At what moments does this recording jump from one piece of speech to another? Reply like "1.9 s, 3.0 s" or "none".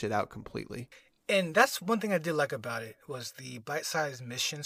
none